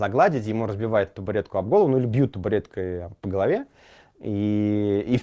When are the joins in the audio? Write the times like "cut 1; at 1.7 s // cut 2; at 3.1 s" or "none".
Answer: cut 1; at 4.1 s